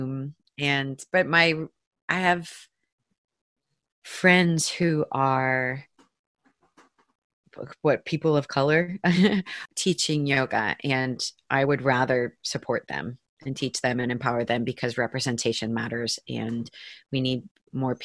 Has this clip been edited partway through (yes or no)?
no